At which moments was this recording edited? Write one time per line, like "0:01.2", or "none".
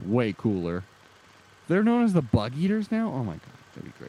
none